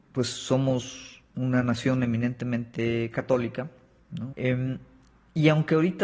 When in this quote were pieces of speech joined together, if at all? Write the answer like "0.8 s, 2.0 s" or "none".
4.3 s